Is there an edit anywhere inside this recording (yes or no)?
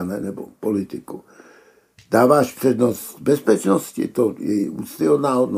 no